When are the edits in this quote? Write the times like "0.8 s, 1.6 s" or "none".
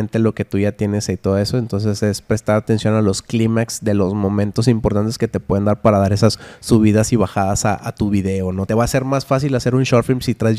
8.7 s